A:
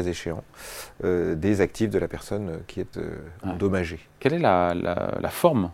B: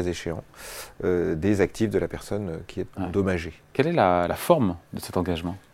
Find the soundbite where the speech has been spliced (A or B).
B